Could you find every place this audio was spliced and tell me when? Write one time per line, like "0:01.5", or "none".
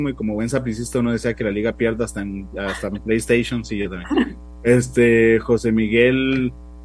0:02.5